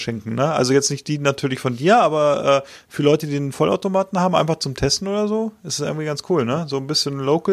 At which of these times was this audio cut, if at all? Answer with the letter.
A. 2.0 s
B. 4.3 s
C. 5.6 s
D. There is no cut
D